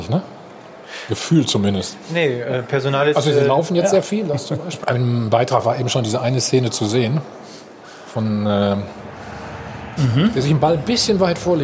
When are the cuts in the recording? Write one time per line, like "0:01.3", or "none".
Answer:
0:04.8
0:10.0